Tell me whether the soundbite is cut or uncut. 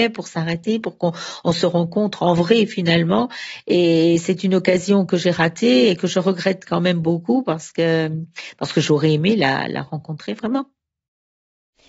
uncut